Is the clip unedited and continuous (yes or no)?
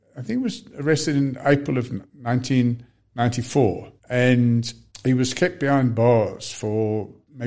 no